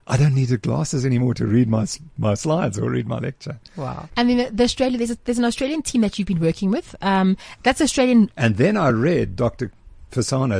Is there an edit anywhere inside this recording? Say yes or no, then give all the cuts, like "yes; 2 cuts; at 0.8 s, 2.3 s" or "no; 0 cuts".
yes; 2 cuts; at 4.1 s, 8.3 s